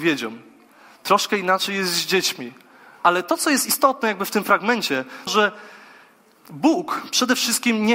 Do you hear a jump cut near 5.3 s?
yes; 2 cuts; at 3.0 s, 5.3 s

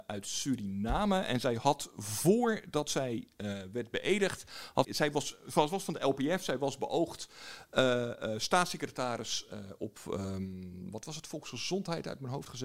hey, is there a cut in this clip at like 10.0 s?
no; 1 cut; at 4.8 s

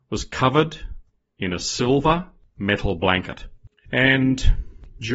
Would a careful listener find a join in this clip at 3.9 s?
yes; 1 cut; at 3.9 s

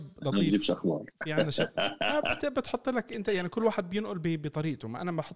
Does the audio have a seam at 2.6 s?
no; 0 cuts

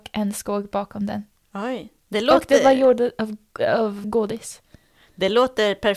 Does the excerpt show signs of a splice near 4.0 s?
yes; 1 cut; at 4.0 s

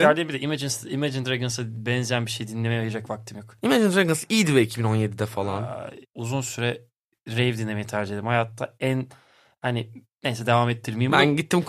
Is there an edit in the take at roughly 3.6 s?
no; 1 cut; at 6.0 s

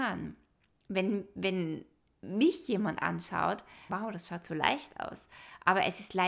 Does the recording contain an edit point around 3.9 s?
yes; 1 cut; at 3.9 s

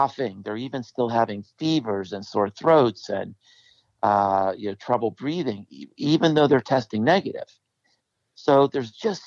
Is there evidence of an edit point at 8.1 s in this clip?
no; 0 cuts

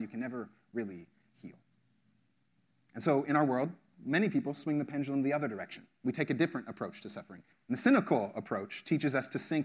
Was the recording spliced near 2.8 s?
no; 1 cut; at 7.5 s

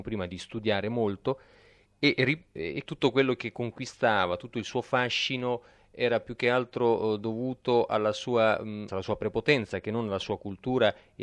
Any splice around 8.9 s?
yes; 2 cuts; at 2.8 s, 8.9 s

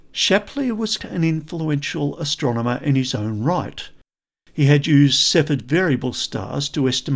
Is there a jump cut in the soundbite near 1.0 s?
yes; 1 cut; at 1.0 s

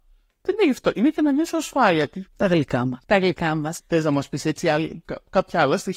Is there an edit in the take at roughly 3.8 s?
yes; 2 cuts; at 2.3 s, 3.8 s

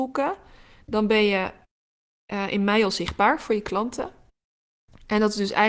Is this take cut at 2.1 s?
no; 0 cuts

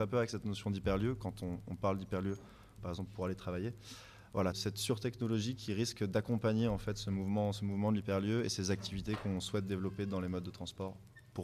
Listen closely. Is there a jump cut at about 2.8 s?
yes; 2 cuts; at 2.8 s, 4.5 s

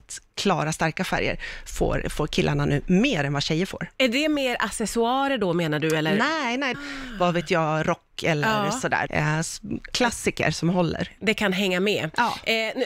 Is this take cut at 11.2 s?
no; 2 cuts; at 6.7 s, 9.1 s

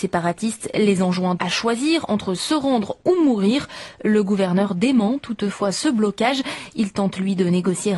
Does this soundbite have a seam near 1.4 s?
yes; 1 cut; at 1.4 s

